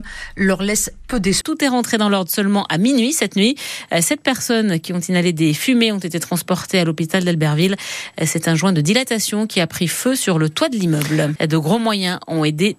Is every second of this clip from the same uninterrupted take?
no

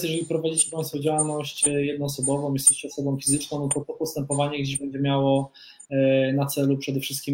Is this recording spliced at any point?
no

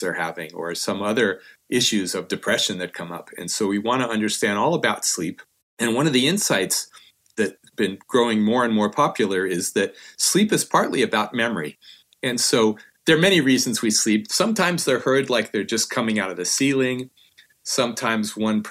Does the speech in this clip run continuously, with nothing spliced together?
no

